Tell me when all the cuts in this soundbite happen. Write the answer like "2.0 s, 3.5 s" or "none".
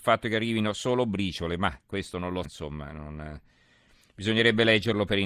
2.4 s